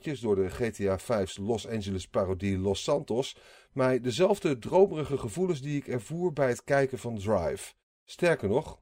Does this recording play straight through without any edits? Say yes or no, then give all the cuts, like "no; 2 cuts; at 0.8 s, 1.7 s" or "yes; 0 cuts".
yes; 0 cuts